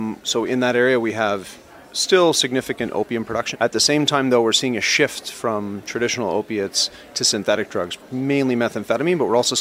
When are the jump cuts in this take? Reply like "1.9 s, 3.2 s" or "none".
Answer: 3.5 s